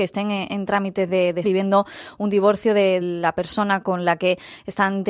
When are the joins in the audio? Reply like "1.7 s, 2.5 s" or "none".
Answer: 1.4 s, 3.0 s